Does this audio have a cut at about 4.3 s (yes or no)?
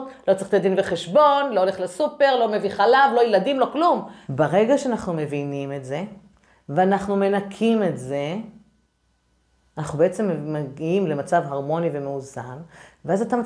yes